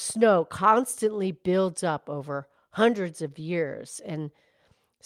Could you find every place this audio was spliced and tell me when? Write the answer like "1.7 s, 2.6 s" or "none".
none